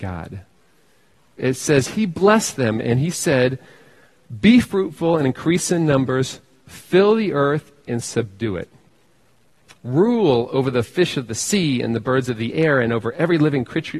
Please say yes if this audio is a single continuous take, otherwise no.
no